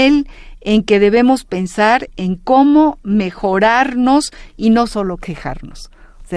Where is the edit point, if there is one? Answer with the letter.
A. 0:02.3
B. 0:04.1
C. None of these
C